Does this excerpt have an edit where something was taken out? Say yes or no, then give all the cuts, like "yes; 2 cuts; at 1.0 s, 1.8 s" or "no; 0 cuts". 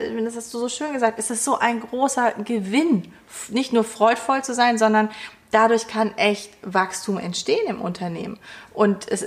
no; 0 cuts